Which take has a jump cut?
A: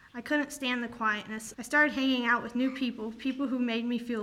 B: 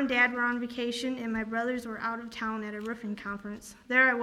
A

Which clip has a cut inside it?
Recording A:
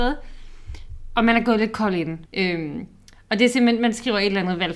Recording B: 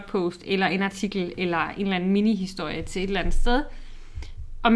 A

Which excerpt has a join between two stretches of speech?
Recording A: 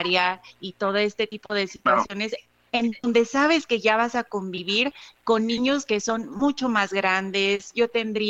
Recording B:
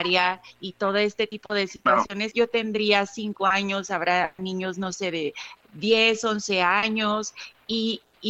B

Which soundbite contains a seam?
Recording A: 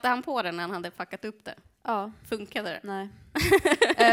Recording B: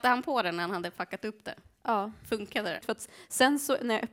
B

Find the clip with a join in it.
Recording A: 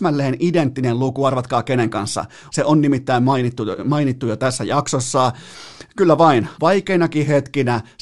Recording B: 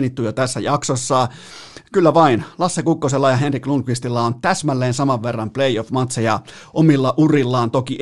A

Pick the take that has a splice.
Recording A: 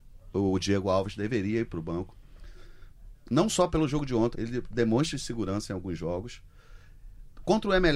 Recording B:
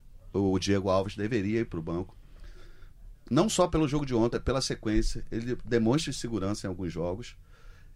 A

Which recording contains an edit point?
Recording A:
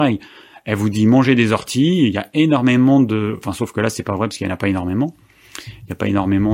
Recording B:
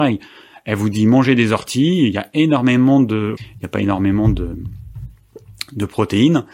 B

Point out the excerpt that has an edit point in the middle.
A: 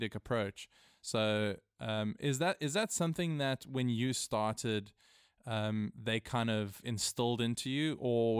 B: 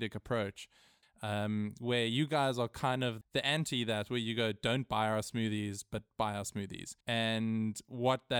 B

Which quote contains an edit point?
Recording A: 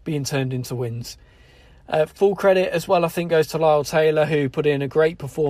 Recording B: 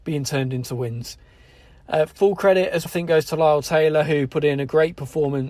B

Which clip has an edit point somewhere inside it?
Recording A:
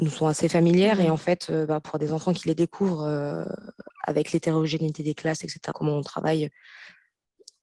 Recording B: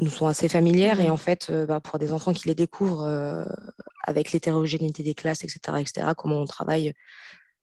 A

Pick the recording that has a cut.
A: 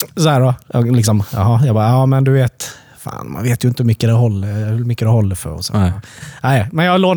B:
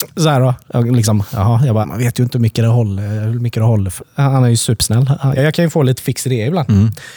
B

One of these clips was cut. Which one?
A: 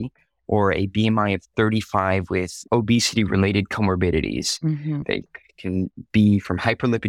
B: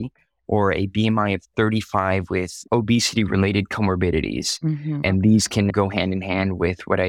A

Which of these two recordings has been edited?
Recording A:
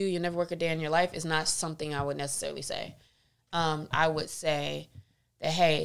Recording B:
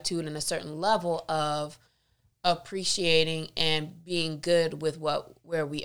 A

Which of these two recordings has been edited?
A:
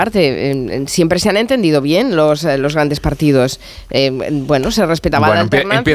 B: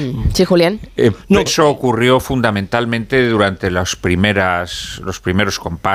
B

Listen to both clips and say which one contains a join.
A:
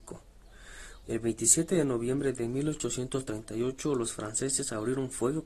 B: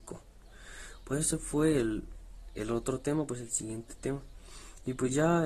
A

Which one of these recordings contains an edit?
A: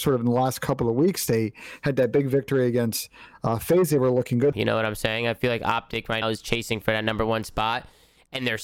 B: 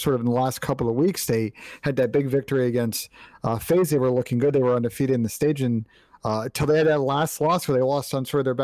A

